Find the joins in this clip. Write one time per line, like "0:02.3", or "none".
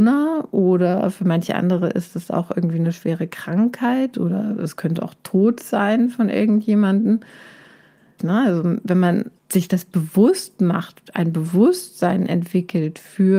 0:08.2
0:09.4